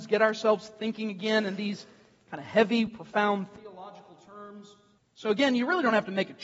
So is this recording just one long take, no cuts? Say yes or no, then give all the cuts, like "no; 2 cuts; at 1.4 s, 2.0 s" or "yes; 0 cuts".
no; 2 cuts; at 2.9 s, 5.0 s